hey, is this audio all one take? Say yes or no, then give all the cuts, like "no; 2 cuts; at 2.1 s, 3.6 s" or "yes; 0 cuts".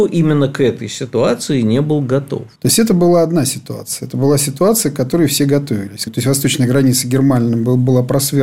no; 2 cuts; at 2.6 s, 6.1 s